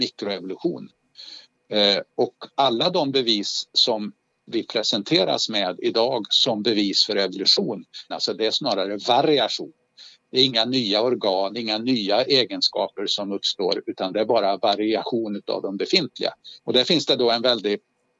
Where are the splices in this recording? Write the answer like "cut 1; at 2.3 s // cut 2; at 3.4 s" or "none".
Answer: cut 1; at 8.1 s // cut 2; at 16.6 s